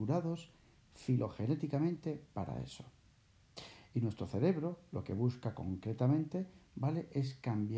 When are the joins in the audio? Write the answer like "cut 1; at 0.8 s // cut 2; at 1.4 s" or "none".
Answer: none